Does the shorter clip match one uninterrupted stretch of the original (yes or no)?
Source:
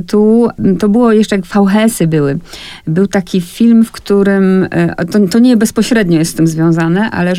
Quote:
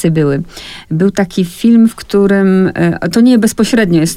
no